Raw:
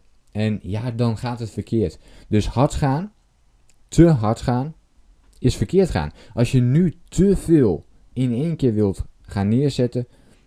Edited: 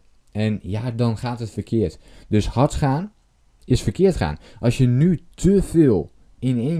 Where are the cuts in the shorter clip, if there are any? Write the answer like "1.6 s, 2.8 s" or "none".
3.6 s